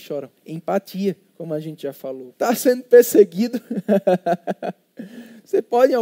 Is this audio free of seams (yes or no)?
no